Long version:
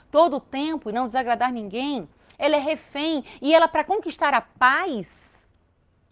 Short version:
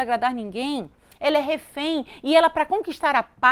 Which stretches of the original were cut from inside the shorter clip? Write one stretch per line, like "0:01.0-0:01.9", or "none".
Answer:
none